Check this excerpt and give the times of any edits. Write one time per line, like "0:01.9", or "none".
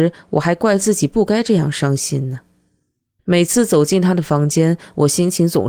0:03.2